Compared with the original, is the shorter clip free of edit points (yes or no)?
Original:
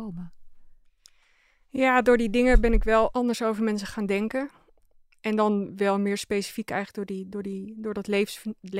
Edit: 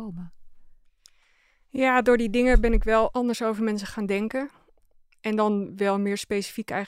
yes